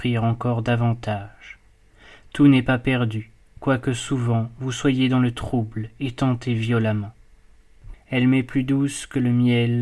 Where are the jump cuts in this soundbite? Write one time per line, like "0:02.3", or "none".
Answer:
0:07.9